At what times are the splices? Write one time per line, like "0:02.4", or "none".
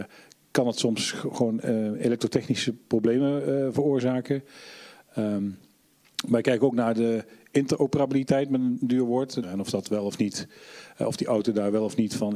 0:09.4

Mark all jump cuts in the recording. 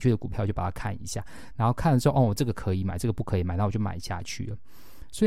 none

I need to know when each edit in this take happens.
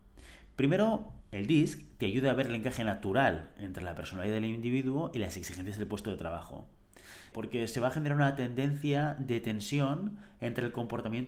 0:01.2
0:07.3

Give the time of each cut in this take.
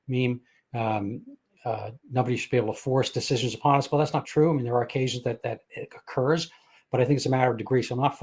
0:04.2

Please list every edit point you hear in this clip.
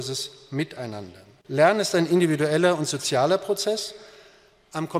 0:01.4

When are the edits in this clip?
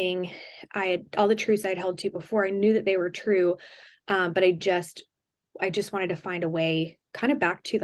none

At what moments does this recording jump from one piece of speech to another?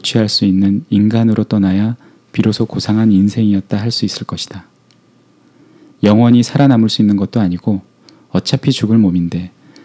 none

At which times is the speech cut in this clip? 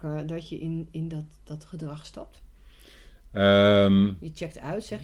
none

